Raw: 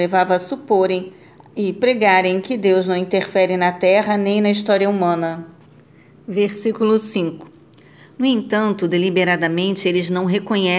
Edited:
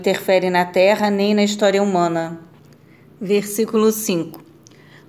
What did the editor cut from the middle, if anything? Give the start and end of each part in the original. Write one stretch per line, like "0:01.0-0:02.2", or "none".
none